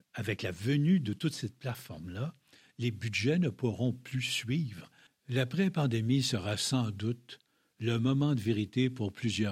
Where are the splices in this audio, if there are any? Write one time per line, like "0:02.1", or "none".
0:05.1